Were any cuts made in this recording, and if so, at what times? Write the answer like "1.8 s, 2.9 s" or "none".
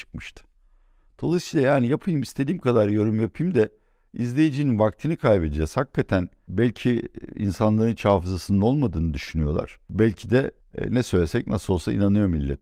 none